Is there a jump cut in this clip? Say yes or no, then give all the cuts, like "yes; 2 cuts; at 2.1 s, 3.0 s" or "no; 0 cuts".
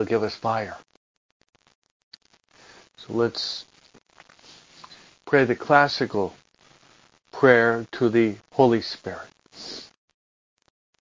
yes; 1 cut; at 8.4 s